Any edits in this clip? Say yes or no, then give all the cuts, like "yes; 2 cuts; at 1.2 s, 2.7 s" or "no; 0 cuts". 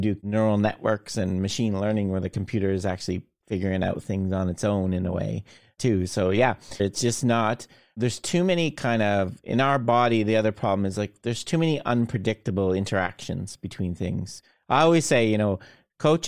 yes; 1 cut; at 6.8 s